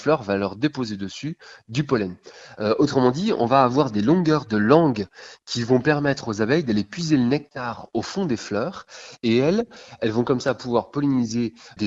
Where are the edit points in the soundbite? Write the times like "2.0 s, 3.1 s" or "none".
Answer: 2.5 s, 9.2 s